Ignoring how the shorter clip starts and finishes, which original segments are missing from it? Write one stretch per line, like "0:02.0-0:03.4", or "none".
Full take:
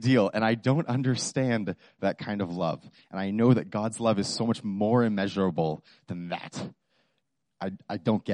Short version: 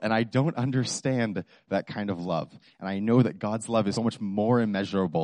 0:04.3-0:04.4